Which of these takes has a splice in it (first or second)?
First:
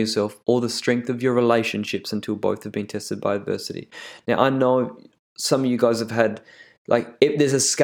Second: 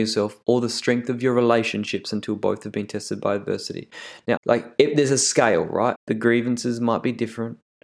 second